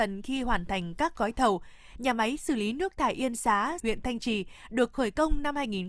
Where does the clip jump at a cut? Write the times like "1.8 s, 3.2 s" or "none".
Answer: 2.0 s, 3.8 s